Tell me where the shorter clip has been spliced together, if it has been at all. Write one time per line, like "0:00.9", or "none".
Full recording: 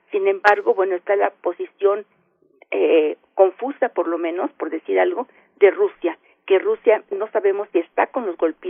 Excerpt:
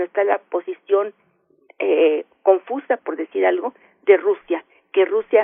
0:03.0